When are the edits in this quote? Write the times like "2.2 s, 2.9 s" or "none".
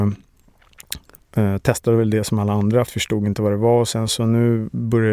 2.9 s